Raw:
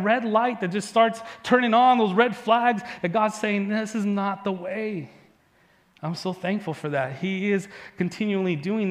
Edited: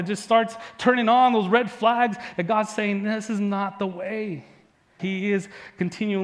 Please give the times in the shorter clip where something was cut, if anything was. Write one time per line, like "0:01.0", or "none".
0:05.0